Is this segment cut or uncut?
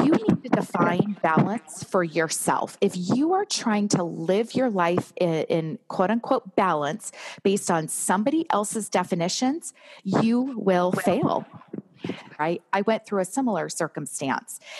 cut